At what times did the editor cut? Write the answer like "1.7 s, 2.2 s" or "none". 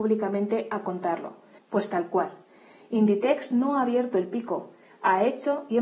1.6 s